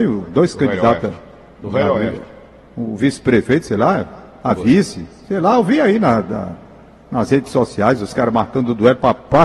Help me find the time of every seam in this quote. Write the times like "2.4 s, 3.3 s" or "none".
none